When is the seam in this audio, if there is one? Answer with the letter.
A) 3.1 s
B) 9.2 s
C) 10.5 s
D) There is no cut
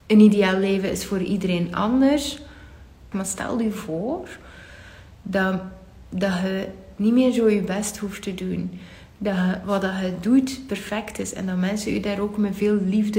A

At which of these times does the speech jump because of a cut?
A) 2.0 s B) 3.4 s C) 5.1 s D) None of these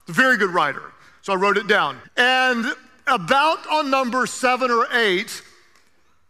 A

